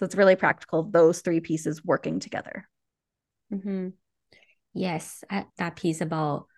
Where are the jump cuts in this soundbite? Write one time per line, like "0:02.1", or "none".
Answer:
0:05.5